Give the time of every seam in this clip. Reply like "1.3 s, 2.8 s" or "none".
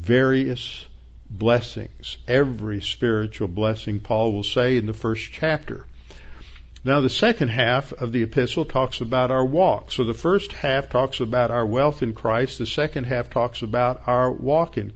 none